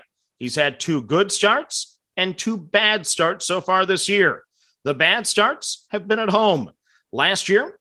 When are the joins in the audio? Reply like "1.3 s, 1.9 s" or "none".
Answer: none